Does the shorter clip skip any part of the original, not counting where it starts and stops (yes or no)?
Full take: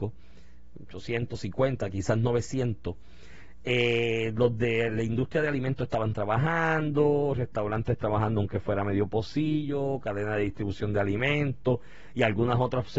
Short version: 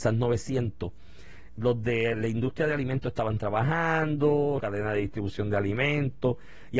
yes